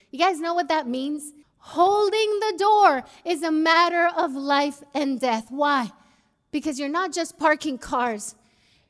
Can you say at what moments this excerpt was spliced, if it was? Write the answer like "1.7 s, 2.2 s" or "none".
1.4 s

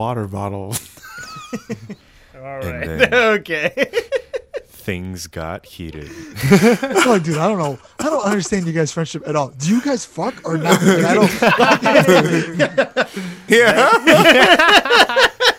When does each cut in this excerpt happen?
13.5 s

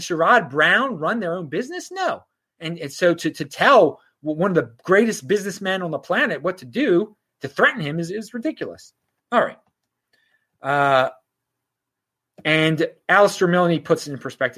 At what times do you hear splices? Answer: 9.2 s

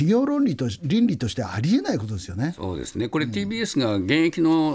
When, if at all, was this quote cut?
none

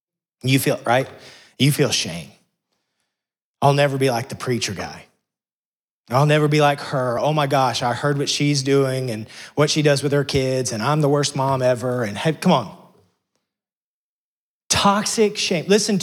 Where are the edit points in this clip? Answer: none

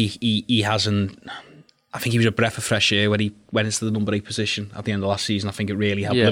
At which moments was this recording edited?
none

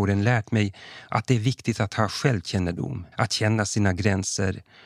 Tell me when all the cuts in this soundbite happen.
3.1 s

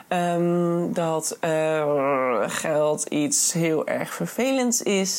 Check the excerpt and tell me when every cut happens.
none

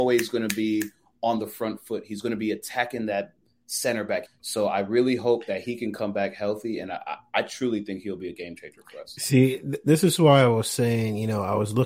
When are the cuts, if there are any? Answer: 4.3 s

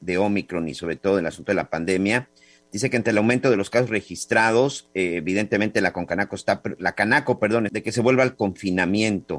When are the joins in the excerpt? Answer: 7.7 s

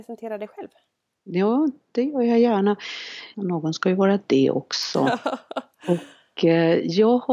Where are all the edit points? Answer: 3.3 s

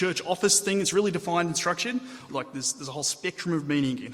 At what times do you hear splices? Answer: 2.3 s

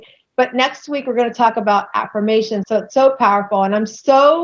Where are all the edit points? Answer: 2.6 s

